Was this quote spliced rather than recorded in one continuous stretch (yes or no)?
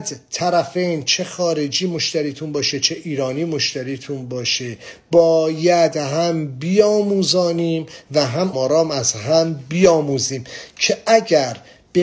yes